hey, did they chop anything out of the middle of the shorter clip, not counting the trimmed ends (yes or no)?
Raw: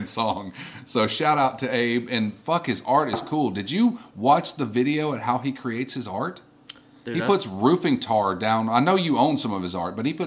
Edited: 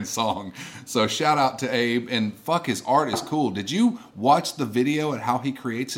no